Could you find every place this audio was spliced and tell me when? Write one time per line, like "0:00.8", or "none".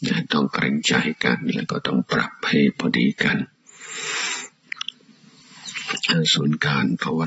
none